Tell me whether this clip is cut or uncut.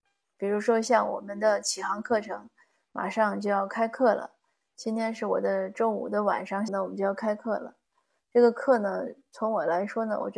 cut